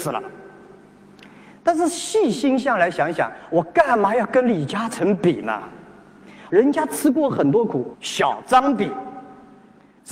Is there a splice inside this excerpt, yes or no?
yes